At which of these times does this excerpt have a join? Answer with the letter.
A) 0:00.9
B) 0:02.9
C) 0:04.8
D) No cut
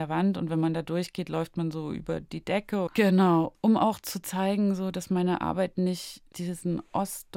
B